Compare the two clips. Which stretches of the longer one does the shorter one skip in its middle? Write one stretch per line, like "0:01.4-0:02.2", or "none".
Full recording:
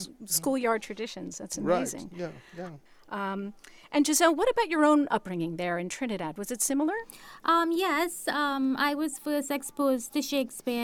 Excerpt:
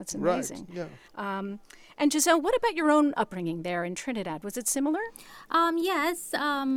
0:02.5-0:03.0